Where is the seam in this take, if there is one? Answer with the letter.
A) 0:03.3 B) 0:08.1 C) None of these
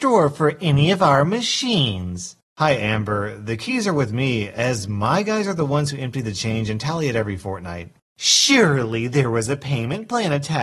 B